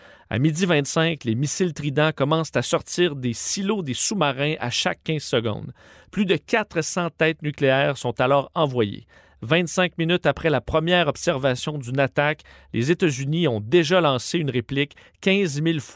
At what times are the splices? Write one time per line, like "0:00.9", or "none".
none